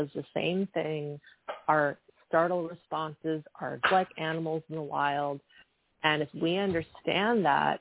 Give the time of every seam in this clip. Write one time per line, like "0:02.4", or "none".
0:03.8